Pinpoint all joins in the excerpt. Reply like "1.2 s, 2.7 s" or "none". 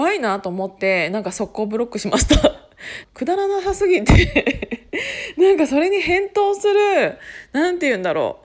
3.0 s